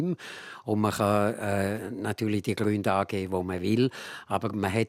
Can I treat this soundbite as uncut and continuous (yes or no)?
yes